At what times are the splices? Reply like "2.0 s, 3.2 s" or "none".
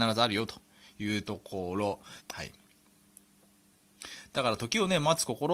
2.2 s